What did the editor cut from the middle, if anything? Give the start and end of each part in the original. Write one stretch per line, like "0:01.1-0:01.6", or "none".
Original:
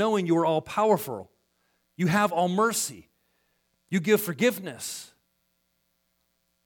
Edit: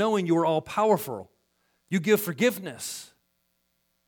0:01.8-0:03.8